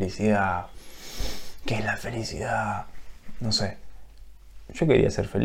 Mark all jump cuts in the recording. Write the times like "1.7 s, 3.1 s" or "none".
none